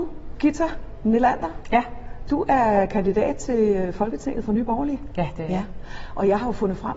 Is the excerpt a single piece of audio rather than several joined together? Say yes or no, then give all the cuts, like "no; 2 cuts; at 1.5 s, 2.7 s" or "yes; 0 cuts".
yes; 0 cuts